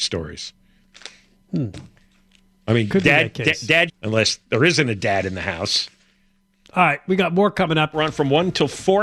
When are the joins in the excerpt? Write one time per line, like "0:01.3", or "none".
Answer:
0:03.9
0:07.9